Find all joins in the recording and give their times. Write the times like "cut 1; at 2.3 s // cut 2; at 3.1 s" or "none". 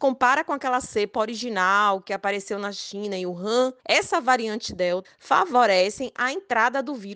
cut 1; at 3.8 s // cut 2; at 5.0 s